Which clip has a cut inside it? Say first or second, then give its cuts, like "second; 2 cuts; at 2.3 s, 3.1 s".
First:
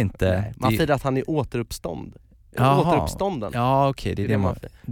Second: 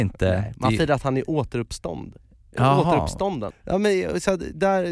second; 1 cut; at 3.5 s